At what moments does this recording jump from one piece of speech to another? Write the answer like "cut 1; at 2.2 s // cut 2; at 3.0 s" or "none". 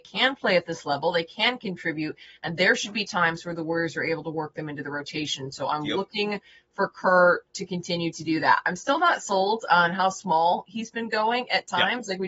none